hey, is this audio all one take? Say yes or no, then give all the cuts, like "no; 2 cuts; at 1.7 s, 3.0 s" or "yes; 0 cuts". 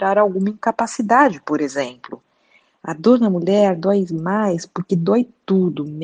yes; 0 cuts